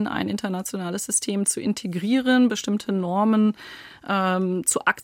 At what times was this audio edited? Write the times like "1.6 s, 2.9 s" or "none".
none